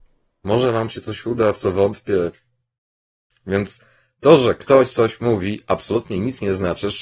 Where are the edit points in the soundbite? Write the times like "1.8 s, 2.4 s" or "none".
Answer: 3.3 s